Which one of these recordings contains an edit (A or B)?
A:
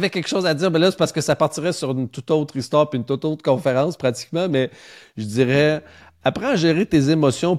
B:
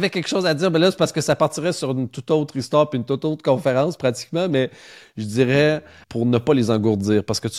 B